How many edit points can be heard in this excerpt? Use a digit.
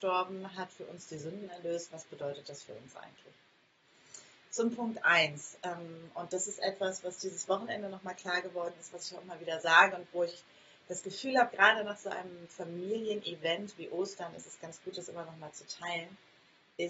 0